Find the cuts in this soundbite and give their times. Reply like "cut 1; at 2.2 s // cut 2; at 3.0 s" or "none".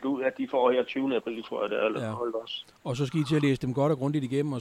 none